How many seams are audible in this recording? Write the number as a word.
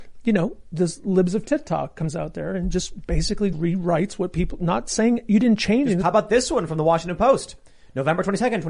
two